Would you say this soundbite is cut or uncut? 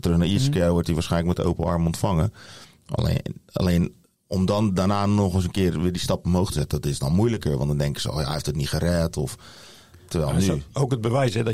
uncut